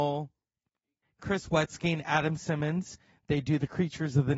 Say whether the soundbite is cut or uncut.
cut